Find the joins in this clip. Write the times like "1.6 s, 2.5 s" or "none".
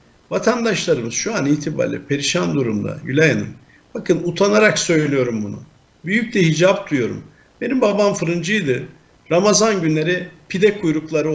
none